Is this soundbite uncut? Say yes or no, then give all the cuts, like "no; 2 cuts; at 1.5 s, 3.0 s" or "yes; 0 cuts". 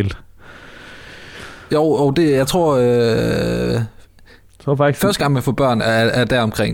yes; 0 cuts